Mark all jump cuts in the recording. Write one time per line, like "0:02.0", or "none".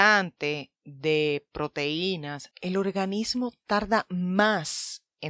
0:02.5